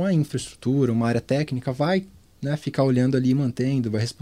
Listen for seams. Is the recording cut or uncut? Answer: uncut